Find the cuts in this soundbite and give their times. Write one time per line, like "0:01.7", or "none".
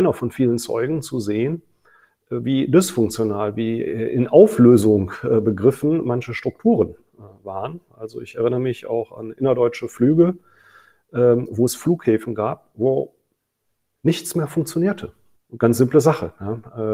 0:15.4